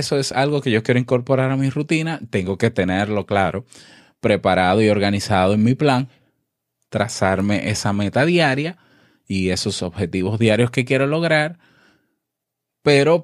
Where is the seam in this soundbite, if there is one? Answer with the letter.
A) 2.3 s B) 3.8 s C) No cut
C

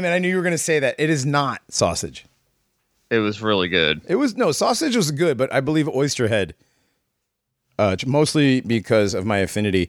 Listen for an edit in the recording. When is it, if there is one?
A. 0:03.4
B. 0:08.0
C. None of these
B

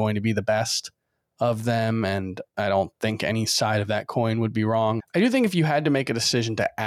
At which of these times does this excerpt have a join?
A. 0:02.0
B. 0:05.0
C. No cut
B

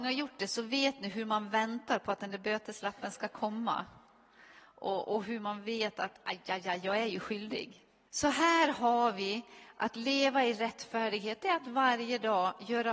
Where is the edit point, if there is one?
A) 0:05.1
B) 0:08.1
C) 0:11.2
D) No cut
B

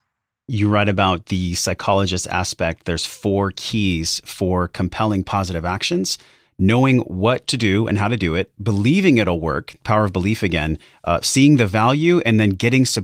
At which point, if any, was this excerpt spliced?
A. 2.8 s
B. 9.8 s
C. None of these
C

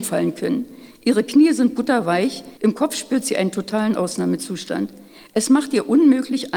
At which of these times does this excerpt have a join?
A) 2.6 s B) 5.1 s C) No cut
A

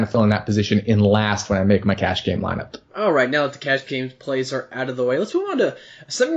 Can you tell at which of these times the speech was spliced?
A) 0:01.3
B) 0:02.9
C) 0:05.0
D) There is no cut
B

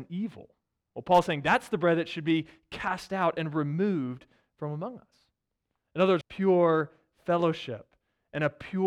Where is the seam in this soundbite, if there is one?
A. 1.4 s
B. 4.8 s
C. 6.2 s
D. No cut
C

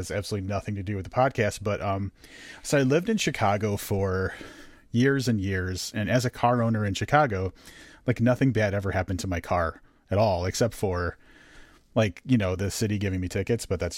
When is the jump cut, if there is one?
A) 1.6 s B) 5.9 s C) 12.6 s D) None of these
D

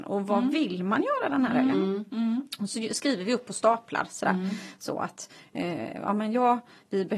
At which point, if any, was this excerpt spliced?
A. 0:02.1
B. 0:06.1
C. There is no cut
C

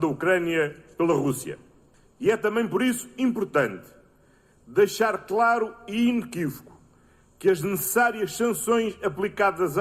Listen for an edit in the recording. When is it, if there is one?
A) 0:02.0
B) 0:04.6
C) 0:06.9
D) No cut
D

